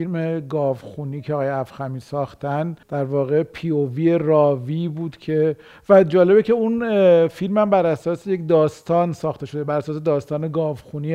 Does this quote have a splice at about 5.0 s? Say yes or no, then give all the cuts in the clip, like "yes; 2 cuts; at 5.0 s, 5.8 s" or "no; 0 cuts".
no; 1 cut; at 2.8 s